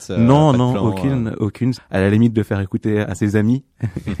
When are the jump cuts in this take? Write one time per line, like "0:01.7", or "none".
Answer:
0:01.7
0:03.0

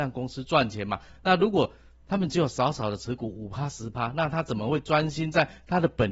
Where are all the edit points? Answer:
none

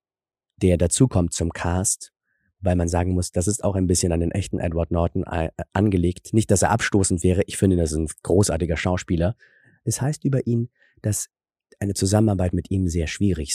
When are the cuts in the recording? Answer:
none

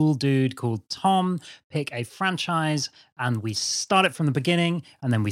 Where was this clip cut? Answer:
none

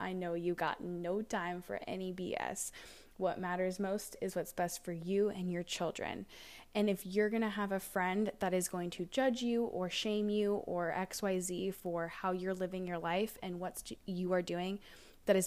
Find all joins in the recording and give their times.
none

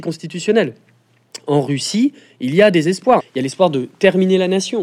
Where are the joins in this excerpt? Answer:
0:03.2

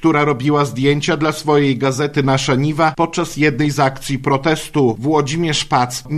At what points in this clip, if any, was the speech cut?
0:05.0

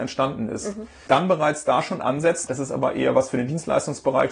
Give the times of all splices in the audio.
0:01.1
0:02.5

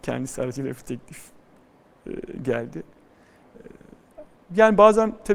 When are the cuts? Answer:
none

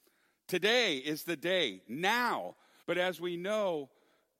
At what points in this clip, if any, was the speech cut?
0:02.8

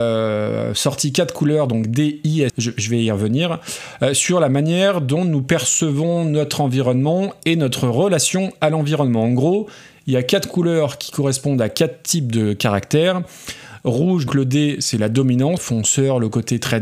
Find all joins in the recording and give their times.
0:02.5
0:14.3
0:15.6

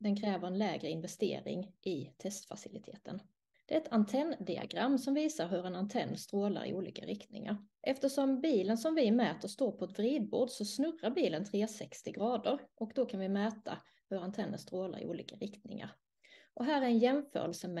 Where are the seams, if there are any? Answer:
0:03.5
0:07.7

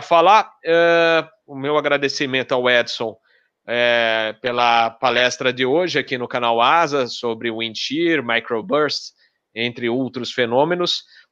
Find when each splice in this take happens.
0:01.4

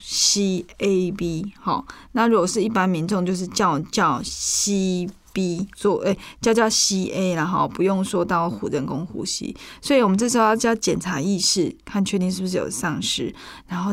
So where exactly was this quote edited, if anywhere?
0:05.7

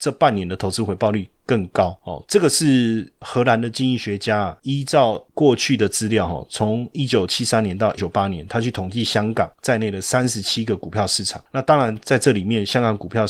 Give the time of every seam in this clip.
0:08.0

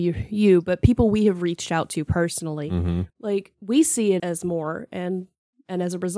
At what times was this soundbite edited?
0:03.1
0:04.2

